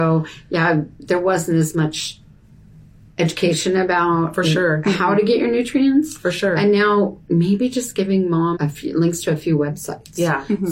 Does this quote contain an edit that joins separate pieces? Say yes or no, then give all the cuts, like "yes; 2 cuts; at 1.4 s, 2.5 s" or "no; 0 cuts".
yes; 2 cuts; at 7.2 s, 8.6 s